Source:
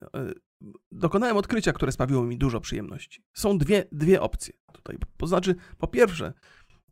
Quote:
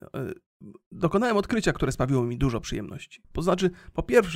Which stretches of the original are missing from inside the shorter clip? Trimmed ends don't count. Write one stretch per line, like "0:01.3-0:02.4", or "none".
0:03.2-0:05.1